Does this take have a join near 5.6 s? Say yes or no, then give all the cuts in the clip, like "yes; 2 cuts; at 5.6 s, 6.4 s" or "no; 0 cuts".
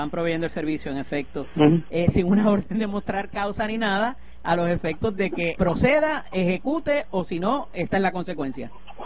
yes; 2 cuts; at 1.9 s, 5.6 s